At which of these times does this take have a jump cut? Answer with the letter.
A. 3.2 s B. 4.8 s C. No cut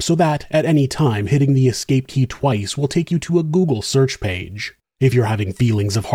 B